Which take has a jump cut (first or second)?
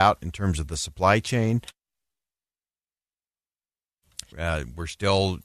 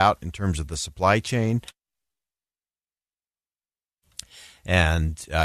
first